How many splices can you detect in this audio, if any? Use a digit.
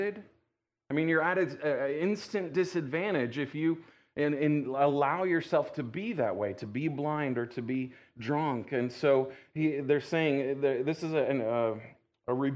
0